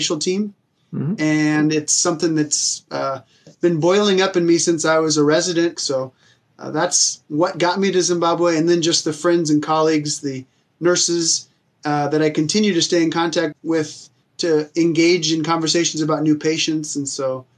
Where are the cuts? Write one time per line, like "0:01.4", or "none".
0:05.8
0:13.5